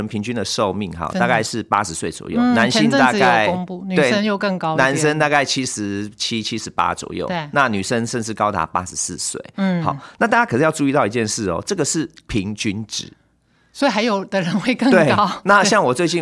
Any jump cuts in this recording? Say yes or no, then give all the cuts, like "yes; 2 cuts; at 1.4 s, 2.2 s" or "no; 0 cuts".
no; 0 cuts